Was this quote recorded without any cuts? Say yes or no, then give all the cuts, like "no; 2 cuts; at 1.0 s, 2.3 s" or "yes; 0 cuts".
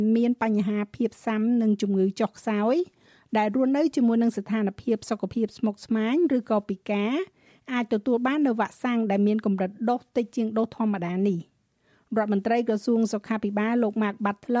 yes; 0 cuts